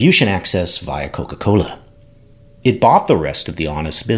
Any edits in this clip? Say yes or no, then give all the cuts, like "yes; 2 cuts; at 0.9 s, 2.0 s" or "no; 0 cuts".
yes; 1 cut; at 2.6 s